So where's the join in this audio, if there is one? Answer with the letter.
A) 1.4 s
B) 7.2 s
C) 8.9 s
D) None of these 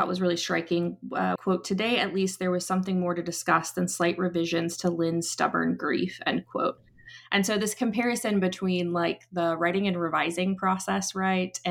A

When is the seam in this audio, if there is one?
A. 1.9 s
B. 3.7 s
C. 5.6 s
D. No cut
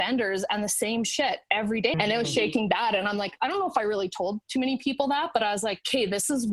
A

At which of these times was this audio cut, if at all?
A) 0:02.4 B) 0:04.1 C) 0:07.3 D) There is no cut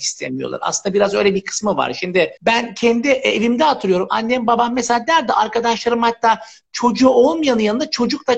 A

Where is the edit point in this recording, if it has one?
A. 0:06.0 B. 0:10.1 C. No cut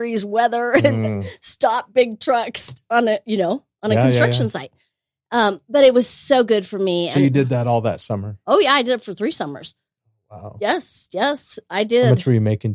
C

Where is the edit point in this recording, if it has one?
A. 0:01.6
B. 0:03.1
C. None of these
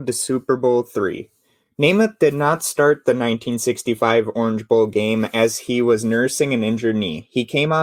C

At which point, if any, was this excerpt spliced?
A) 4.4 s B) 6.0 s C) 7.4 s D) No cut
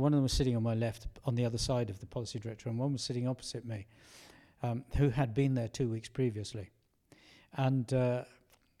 D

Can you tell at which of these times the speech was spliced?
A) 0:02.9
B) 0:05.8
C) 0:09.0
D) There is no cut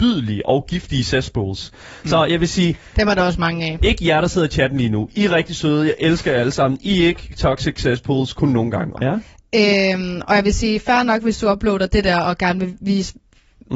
C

